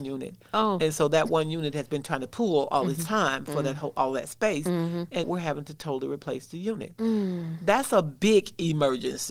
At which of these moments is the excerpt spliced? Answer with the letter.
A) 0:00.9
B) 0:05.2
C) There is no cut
B